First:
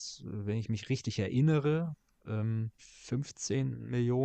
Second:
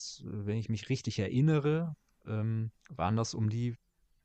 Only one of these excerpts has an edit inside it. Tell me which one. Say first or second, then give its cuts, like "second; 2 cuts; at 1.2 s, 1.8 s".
first; 1 cut; at 2.8 s